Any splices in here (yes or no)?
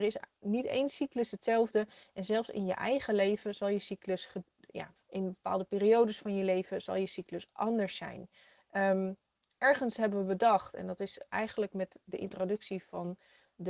yes